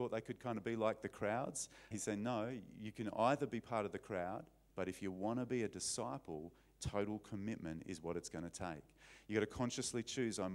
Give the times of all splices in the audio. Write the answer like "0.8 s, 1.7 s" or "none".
1.9 s, 4.7 s